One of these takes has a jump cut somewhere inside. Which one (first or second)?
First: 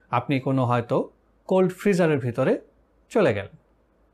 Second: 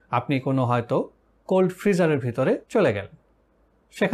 second